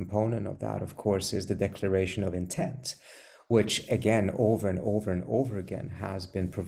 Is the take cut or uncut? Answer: uncut